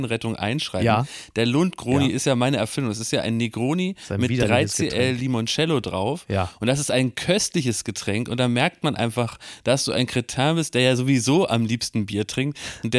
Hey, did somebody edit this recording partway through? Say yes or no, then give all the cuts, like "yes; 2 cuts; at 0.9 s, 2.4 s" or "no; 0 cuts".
no; 0 cuts